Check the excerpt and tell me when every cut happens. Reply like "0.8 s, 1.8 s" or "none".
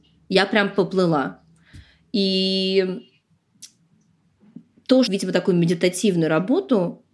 5.1 s